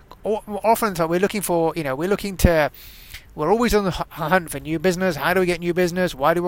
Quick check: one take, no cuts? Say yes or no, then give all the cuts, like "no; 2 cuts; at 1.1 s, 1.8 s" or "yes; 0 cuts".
yes; 0 cuts